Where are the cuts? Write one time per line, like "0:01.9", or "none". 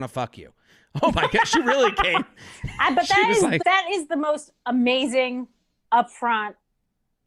0:03.6